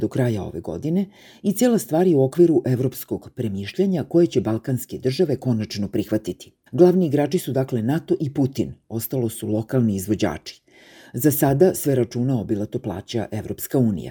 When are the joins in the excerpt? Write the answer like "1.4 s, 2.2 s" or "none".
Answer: 6.7 s